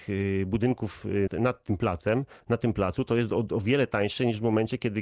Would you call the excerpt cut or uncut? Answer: cut